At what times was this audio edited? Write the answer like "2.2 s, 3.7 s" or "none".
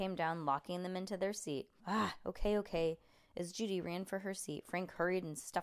1.8 s